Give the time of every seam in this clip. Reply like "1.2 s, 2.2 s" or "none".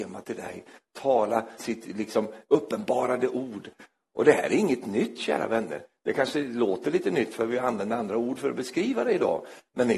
1.6 s